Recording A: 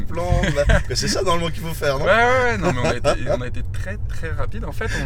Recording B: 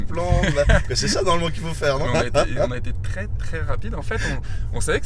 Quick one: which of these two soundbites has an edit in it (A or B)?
B